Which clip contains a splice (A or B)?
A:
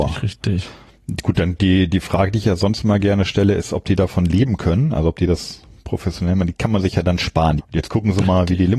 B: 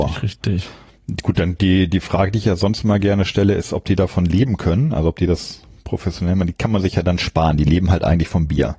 A